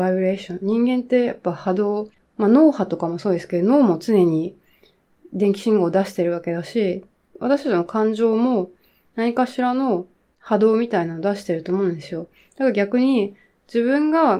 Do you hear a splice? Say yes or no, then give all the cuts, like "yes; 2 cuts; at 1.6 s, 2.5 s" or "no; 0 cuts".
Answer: yes; 1 cut; at 12.4 s